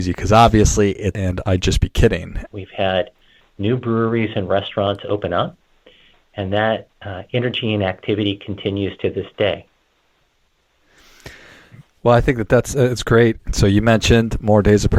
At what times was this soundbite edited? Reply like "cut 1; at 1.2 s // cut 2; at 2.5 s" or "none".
cut 1; at 1.1 s // cut 2; at 2.5 s // cut 3; at 13.4 s